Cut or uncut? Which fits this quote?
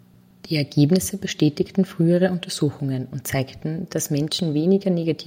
uncut